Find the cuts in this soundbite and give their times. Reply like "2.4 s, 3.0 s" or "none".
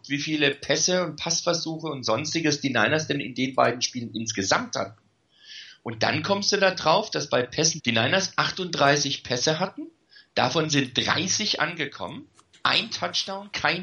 7.8 s, 12.5 s